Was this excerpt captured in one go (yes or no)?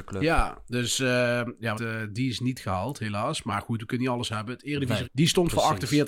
no